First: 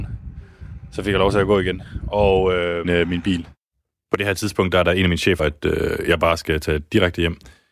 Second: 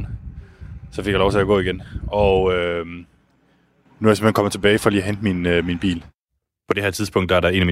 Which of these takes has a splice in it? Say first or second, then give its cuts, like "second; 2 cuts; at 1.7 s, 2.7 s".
first; 2 cuts; at 2.8 s, 5.4 s